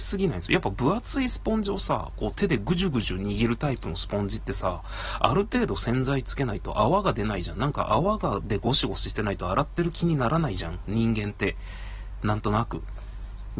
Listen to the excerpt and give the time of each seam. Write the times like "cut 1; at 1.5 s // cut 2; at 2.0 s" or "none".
none